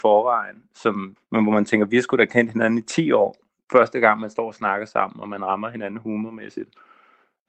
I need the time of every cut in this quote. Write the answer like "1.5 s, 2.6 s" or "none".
1.2 s